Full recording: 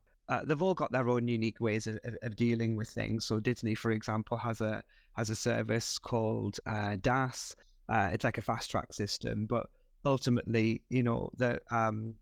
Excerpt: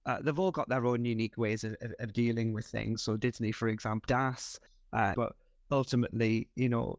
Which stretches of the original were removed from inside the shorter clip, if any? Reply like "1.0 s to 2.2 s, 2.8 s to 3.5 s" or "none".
4.3 s to 7.0 s, 8.1 s to 9.5 s